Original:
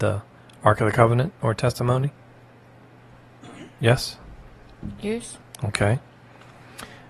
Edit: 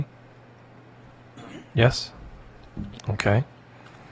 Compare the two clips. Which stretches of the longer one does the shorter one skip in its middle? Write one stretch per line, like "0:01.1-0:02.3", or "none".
0:05.0-0:05.5